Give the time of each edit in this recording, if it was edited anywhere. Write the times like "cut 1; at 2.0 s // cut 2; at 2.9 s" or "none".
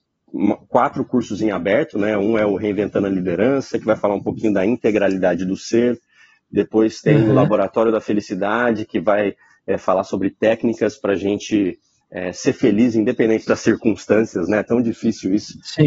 none